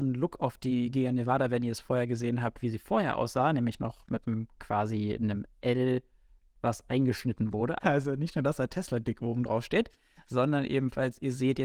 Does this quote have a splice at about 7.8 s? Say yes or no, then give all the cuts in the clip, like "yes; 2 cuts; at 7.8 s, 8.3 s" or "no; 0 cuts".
yes; 1 cut; at 7.8 s